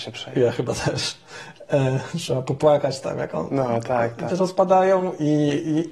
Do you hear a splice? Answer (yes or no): yes